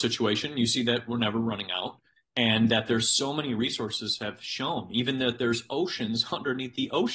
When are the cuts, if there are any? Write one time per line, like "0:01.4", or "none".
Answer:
none